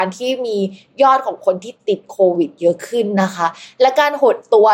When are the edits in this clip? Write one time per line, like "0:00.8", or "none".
none